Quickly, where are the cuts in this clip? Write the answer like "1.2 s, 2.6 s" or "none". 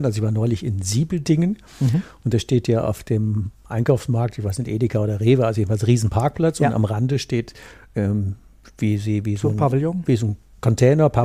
none